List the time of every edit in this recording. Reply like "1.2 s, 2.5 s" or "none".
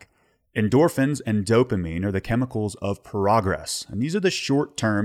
none